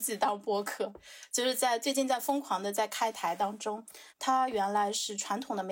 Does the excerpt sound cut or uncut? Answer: cut